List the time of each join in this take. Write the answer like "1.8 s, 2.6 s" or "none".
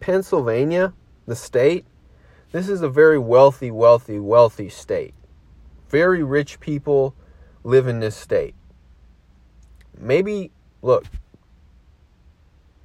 none